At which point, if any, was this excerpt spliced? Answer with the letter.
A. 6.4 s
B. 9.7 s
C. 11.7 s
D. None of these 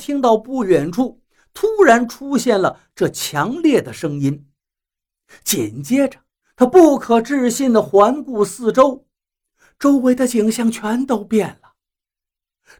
A